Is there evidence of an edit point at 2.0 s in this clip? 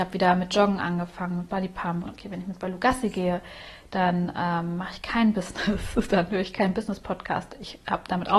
yes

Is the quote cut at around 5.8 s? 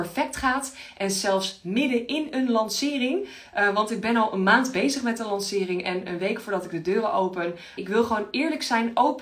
no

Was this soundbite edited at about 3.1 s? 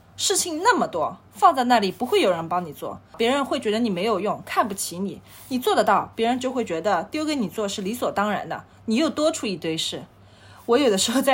yes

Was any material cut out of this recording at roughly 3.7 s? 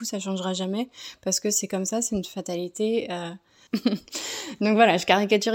yes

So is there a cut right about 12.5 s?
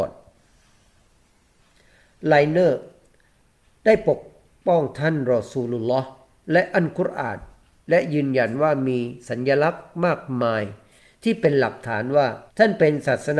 yes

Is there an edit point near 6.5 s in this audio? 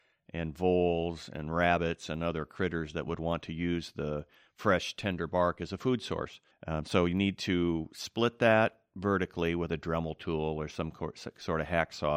yes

